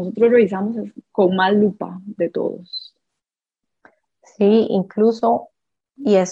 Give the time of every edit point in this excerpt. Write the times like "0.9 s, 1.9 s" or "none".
none